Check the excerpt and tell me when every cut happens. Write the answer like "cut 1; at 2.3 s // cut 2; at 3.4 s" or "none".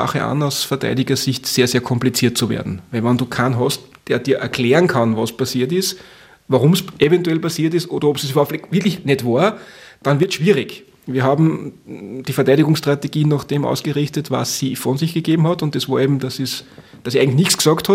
none